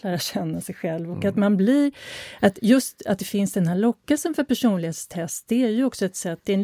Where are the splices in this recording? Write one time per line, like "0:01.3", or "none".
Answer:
none